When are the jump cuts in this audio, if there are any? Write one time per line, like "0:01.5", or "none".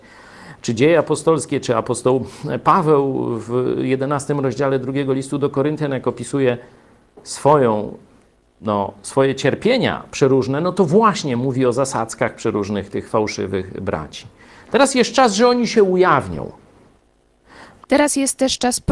0:17.8